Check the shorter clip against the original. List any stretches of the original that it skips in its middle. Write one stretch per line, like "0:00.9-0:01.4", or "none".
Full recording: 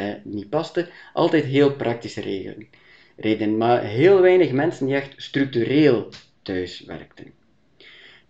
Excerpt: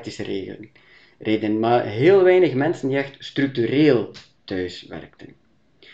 none